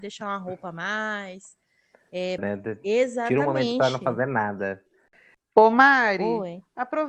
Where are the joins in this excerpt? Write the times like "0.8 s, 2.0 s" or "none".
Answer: 2.4 s, 5.4 s

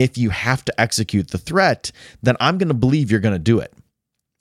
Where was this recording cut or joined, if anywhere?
none

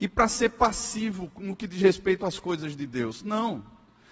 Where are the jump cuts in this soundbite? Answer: none

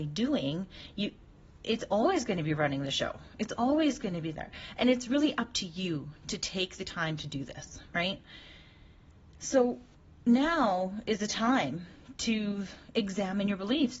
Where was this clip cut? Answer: none

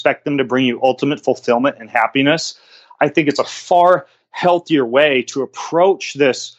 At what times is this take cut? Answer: none

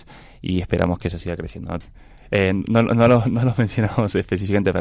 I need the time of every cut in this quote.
1.8 s

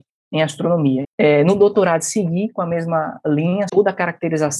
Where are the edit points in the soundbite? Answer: 1.0 s, 3.7 s

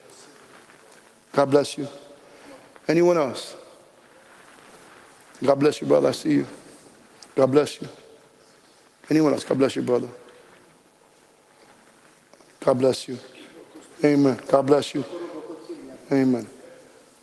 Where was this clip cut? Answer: none

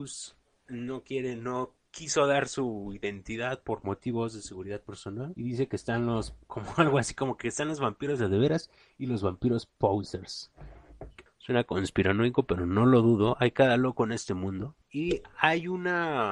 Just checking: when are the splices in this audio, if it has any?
11.3 s

